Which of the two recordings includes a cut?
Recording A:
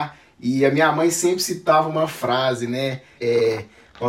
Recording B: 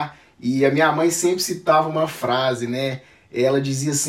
A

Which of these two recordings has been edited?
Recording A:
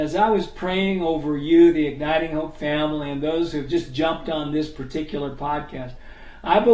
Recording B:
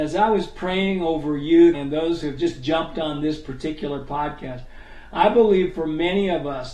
B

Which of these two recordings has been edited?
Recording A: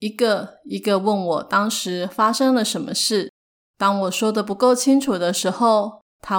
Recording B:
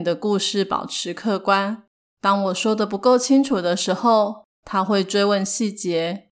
B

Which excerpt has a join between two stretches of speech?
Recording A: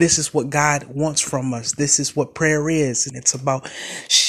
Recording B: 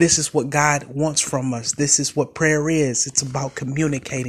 A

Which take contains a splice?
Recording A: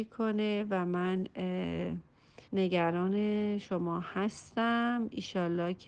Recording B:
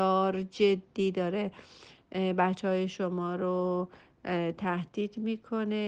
A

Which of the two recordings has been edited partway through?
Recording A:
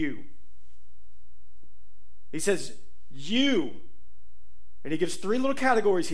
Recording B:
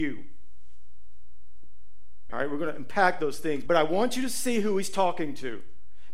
B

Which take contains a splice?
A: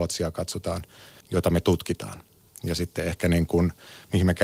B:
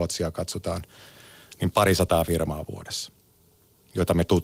A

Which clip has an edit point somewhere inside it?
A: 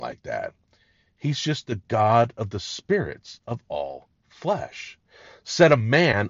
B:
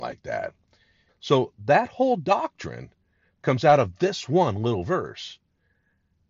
B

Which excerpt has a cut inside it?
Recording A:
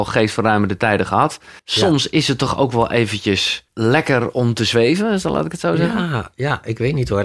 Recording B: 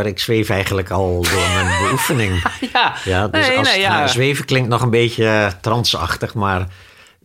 A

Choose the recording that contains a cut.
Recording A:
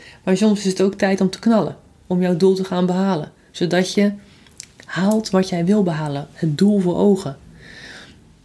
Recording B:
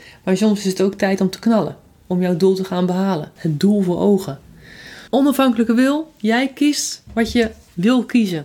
B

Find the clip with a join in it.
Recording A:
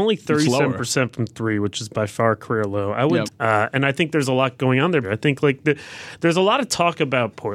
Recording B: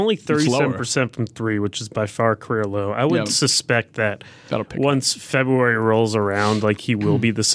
A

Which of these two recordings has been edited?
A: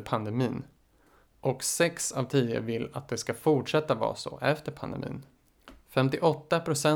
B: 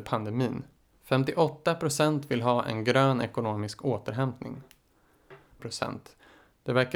B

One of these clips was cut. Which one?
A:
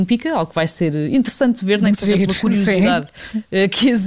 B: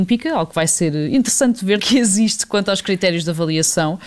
B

